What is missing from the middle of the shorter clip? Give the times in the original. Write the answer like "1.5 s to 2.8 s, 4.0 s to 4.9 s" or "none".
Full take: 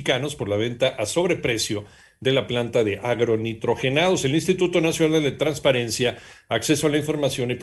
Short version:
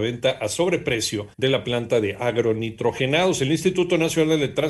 1.9 s to 2.2 s